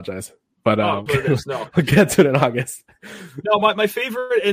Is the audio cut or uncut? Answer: cut